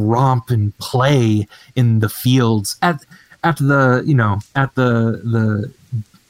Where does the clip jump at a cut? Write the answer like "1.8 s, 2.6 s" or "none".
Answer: none